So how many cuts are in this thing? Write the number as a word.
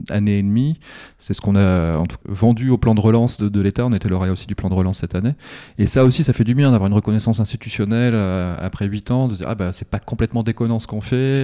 one